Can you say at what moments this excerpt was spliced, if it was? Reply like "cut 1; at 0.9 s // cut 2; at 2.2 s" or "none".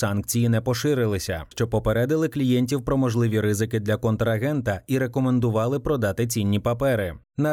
cut 1; at 1.5 s